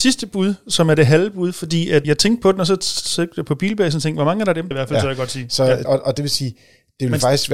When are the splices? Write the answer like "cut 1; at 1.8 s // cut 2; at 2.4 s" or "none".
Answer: cut 1; at 2.0 s // cut 2; at 4.7 s // cut 3; at 5.8 s